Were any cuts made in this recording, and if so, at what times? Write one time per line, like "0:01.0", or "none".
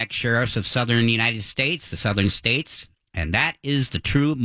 0:02.9